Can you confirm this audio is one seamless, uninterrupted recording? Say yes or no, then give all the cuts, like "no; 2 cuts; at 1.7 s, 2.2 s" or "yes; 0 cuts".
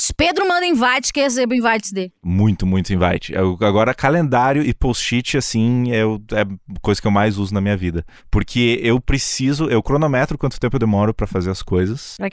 yes; 0 cuts